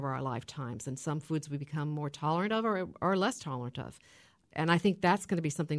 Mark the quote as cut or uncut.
uncut